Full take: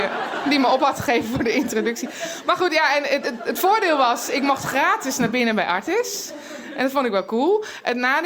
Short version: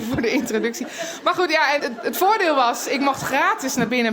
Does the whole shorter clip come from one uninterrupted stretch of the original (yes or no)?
no